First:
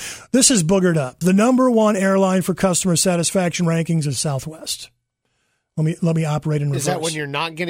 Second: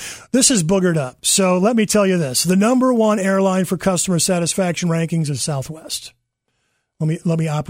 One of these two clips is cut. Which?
first; 1 cut; at 1.2 s

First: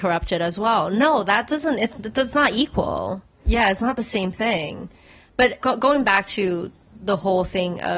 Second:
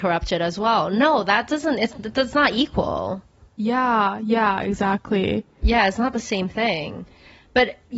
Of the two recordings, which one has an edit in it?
first; 2 cuts; at 3.4 s, 5.6 s

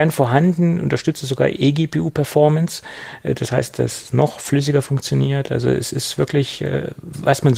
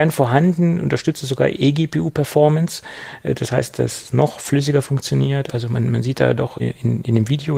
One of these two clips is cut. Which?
second; 2 cuts; at 5.5 s, 6.6 s

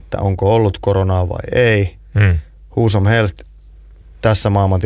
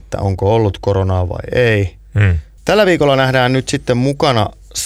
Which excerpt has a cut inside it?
second; 1 cut; at 2.6 s

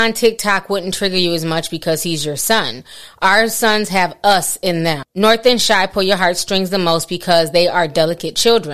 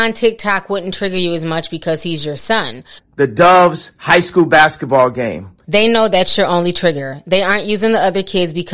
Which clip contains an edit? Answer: second; 2 cuts; at 3.0 s, 5.6 s

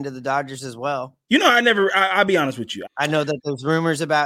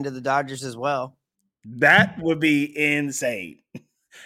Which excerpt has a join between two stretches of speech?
first; 2 cuts; at 1.3 s, 2.9 s

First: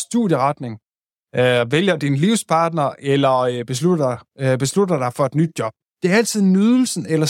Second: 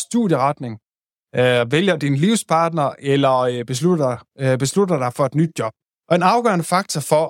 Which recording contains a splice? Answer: second; 1 cut; at 5.9 s

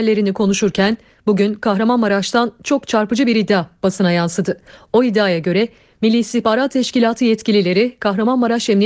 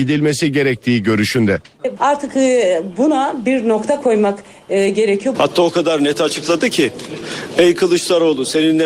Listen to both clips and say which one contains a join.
second; 2 cuts; at 2.0 s, 5.3 s

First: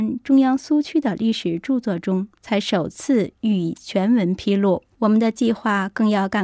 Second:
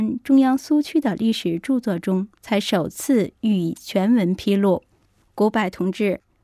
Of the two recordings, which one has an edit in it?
first; 1 cut; at 4.9 s

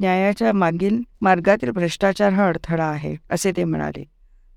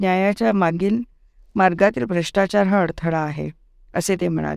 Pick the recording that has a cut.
first; 2 cuts; at 1.1 s, 3.2 s

